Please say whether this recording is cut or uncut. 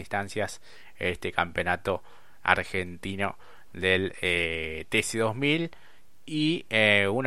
uncut